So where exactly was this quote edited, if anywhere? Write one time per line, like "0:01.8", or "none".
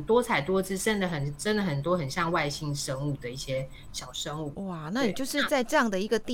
0:04.5